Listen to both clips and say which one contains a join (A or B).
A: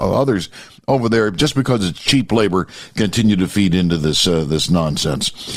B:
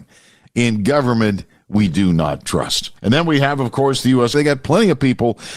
B